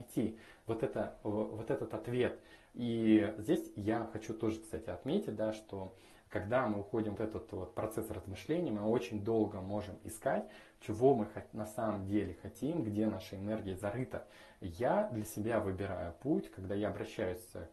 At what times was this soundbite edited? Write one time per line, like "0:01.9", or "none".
0:07.1